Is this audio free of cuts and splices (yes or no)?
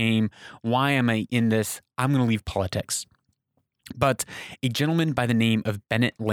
no